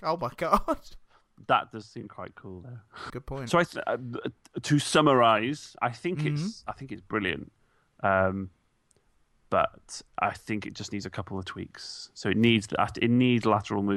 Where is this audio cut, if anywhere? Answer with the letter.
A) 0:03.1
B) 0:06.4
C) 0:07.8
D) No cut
A